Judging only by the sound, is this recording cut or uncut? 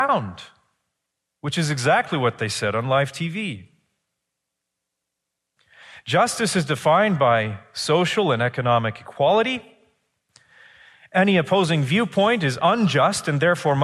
uncut